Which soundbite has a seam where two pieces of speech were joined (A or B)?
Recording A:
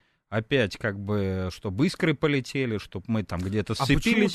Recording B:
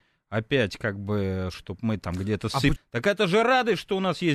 B